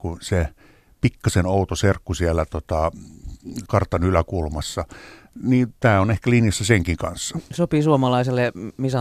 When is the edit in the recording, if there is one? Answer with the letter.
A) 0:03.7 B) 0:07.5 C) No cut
A